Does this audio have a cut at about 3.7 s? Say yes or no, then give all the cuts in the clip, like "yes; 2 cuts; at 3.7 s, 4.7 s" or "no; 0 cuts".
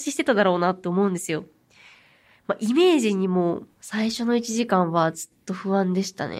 yes; 1 cut; at 3.7 s